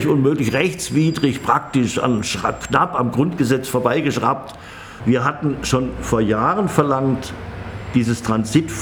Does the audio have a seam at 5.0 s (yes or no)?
yes